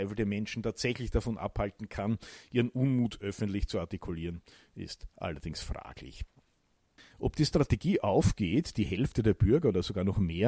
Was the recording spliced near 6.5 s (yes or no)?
no